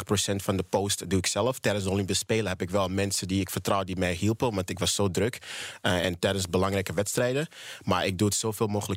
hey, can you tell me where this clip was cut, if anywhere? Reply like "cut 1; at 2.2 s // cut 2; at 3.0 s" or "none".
none